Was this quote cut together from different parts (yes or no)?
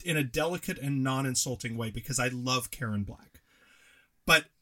no